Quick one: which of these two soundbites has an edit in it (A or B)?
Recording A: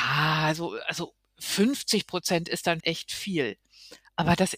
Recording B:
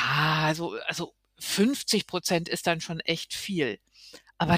A